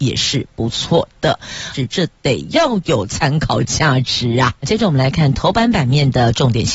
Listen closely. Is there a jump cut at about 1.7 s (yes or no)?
yes